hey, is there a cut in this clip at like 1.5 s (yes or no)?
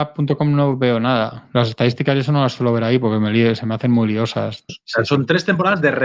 no